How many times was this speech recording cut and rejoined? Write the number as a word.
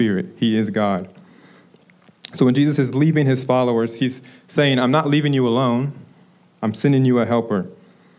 zero